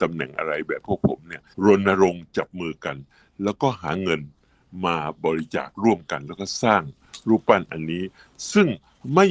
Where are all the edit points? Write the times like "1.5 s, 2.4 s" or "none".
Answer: 1.5 s